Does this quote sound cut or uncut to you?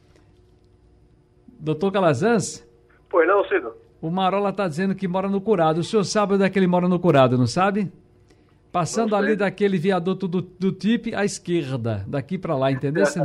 uncut